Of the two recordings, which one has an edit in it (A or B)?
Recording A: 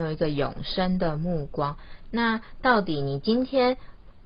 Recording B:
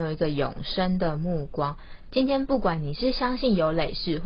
A